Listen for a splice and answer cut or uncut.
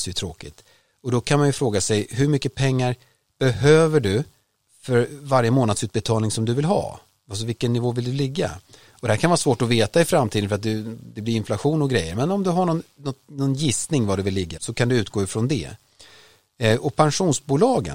cut